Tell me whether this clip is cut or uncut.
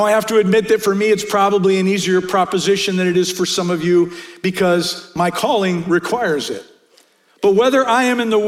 uncut